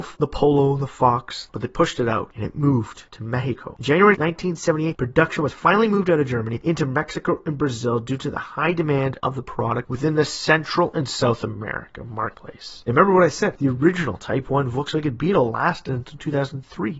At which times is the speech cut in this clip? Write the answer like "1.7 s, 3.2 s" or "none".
1.5 s